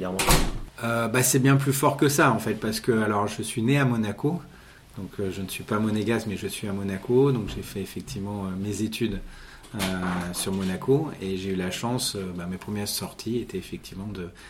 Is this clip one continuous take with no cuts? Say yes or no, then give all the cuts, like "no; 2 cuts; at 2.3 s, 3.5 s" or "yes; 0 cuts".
yes; 0 cuts